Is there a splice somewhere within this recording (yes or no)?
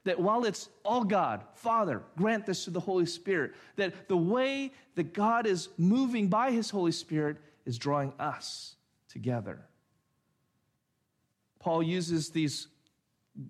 no